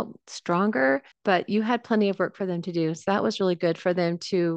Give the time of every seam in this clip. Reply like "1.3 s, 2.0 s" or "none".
1.1 s

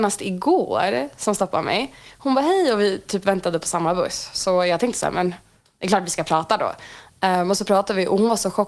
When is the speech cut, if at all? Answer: none

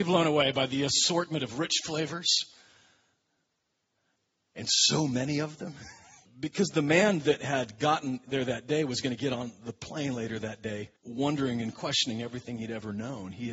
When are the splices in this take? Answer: 6.2 s, 11.0 s

